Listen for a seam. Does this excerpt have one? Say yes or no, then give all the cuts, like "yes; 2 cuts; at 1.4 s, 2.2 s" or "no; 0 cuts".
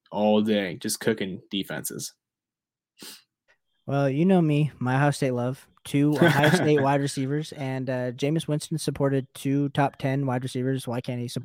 no; 0 cuts